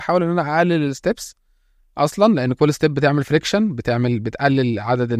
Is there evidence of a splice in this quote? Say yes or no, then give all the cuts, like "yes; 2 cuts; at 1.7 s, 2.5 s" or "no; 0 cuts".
no; 0 cuts